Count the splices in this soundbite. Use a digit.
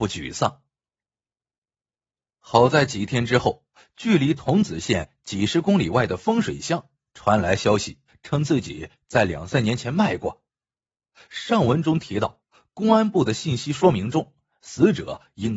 1